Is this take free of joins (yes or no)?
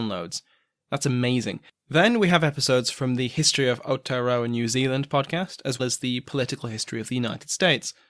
no